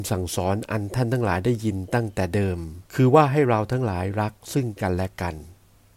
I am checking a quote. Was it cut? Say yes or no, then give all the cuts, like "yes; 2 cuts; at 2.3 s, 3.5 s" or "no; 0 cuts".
yes; 1 cut; at 2.9 s